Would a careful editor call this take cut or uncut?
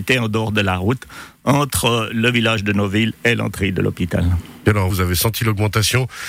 cut